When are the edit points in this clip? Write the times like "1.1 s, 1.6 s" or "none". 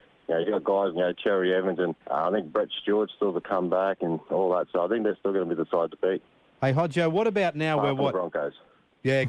0.9 s, 2.0 s